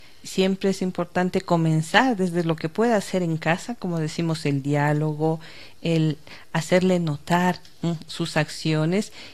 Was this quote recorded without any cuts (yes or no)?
yes